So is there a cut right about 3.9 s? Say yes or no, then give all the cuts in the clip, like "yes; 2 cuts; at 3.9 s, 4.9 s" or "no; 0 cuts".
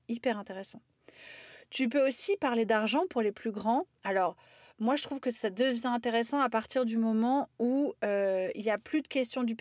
no; 0 cuts